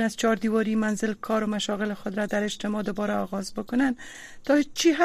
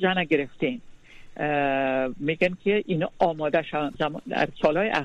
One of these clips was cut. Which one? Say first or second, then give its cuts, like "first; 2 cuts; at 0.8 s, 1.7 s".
second; 1 cut; at 3.9 s